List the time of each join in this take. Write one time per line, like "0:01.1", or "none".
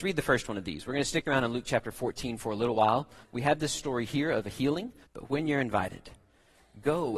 0:03.2
0:05.0